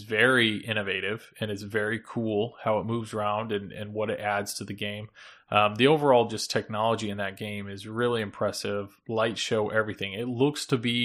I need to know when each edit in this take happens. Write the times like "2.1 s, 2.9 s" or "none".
none